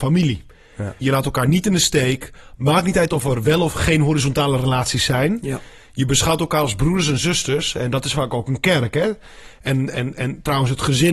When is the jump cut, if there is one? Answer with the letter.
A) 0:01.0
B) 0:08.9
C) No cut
A